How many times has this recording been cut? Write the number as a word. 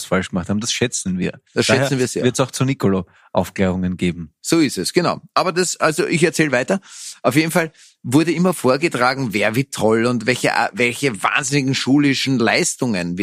zero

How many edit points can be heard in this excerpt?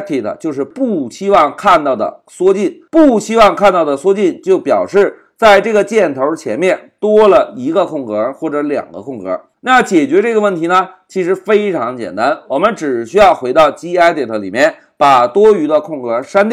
one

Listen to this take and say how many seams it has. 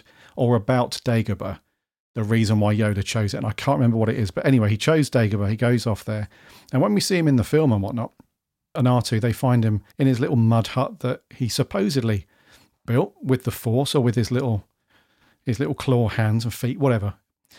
two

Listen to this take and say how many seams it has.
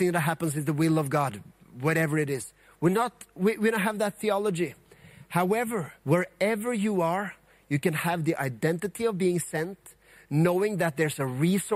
one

